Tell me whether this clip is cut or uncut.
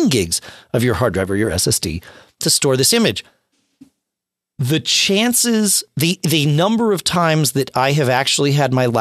uncut